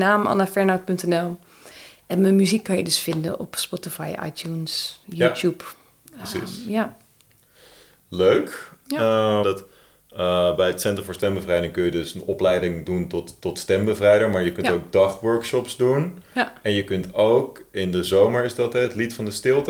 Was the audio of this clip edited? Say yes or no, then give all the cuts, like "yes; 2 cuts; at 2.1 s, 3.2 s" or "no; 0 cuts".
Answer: yes; 1 cut; at 9.4 s